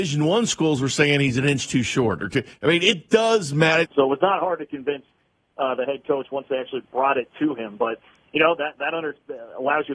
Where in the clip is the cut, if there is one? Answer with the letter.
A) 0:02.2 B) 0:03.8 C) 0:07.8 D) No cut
B